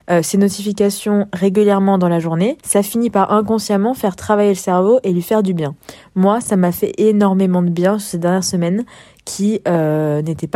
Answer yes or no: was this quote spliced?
no